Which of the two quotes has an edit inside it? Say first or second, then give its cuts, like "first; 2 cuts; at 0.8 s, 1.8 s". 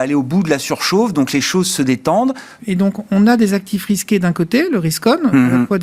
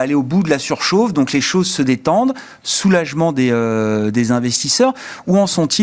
first; 1 cut; at 2.6 s